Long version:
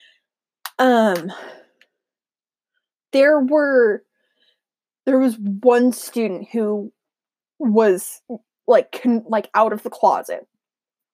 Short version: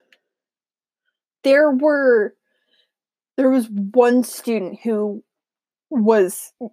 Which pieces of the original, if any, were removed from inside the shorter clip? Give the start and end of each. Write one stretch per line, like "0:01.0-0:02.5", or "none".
none